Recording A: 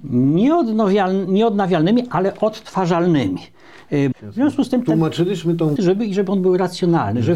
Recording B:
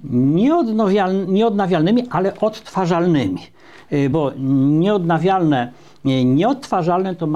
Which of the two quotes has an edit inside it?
A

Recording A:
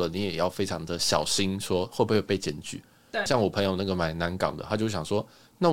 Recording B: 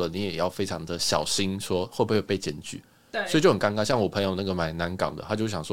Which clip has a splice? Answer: A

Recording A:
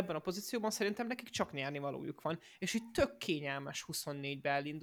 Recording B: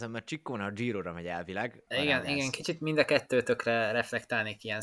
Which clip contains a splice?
B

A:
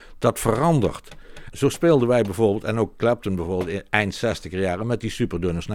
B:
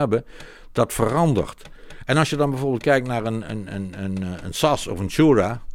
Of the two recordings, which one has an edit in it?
A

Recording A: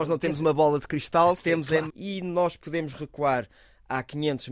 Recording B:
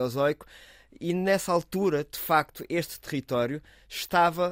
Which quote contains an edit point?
A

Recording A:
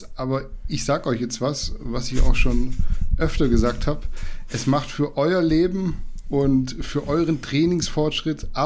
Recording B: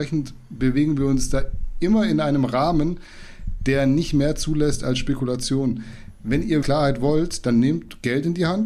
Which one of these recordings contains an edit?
B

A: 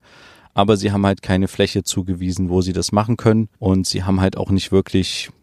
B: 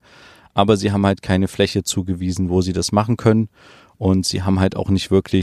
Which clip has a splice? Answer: A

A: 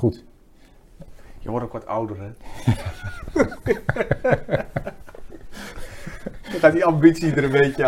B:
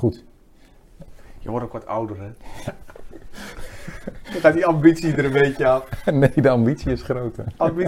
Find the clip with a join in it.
B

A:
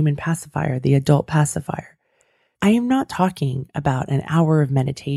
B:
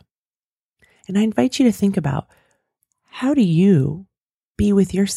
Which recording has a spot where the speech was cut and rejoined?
A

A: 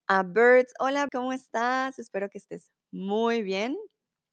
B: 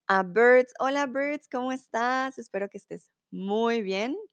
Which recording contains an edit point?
A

